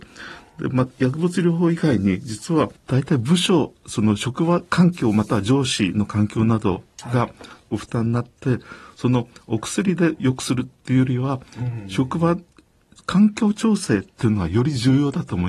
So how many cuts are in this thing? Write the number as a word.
zero